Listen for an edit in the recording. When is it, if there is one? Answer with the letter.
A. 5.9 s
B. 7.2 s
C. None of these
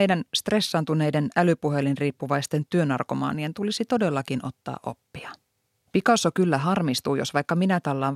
A